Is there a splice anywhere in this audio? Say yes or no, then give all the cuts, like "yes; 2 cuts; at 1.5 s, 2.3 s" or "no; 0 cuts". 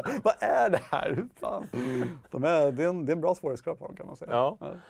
no; 0 cuts